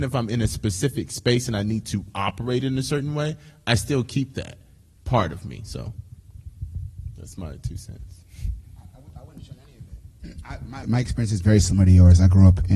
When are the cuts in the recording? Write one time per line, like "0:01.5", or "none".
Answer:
0:10.8